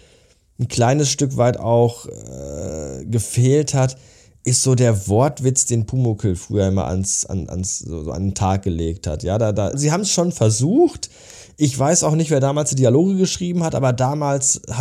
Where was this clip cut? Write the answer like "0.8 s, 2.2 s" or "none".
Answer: 9.7 s